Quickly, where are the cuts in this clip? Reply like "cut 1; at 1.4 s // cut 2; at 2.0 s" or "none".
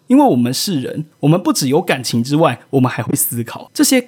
cut 1; at 1.1 s

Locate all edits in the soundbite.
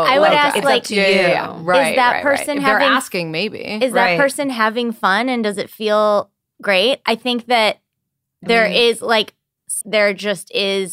cut 1; at 9.8 s

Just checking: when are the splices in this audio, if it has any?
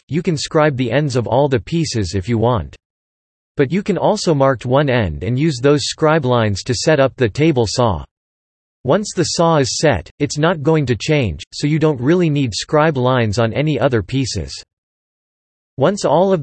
cut 1; at 4.6 s

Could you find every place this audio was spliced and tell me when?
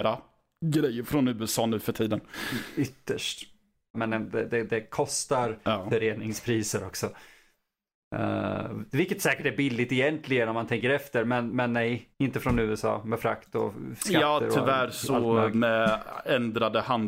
cut 1; at 3.9 s // cut 2; at 12.1 s

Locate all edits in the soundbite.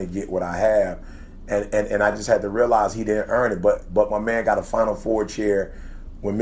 none

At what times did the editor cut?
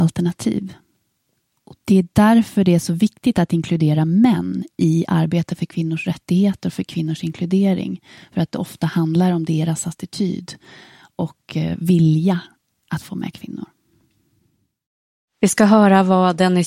cut 1; at 12.8 s

